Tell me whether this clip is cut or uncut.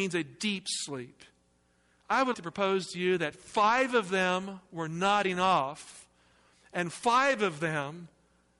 cut